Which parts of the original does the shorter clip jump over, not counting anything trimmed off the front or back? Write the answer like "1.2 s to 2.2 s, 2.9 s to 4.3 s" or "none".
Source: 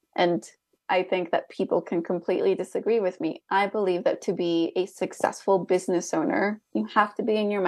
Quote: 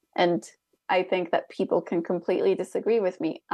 none